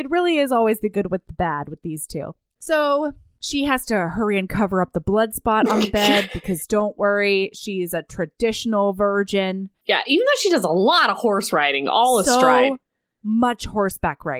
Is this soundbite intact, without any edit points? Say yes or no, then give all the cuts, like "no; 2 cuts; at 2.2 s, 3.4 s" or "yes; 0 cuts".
yes; 0 cuts